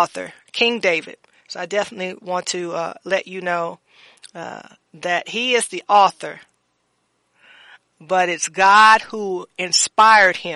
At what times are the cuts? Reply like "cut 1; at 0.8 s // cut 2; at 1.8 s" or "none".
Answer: none